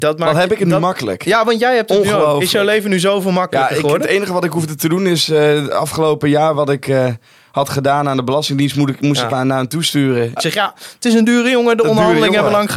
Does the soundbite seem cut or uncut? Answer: cut